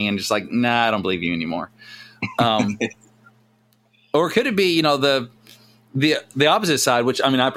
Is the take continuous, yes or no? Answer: yes